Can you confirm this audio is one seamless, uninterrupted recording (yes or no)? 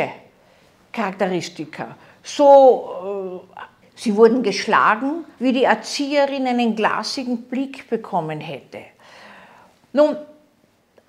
no